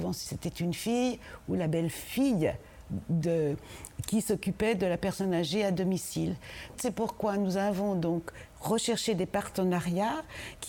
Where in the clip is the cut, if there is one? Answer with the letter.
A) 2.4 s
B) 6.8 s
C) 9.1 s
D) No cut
B